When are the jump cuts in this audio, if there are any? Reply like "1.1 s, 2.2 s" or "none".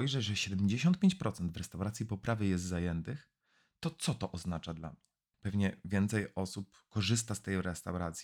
5.3 s